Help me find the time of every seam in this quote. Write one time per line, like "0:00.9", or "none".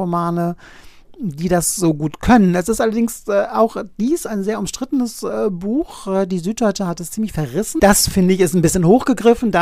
0:07.8